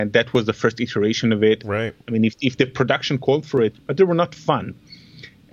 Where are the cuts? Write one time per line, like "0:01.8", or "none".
0:01.6
0:03.7